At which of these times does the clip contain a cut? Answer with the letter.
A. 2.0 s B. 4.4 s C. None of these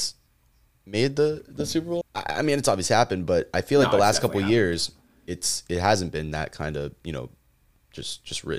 A